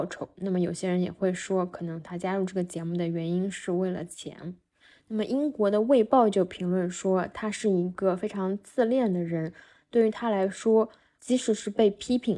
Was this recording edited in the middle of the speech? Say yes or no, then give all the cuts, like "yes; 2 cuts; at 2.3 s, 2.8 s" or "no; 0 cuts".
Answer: no; 0 cuts